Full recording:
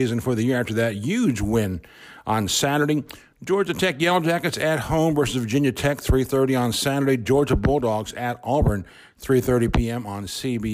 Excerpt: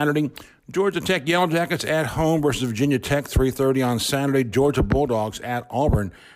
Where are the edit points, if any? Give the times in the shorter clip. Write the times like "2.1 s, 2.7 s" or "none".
none